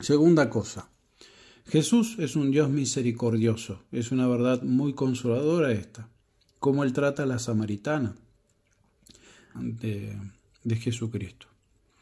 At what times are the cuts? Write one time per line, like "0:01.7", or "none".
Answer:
0:09.5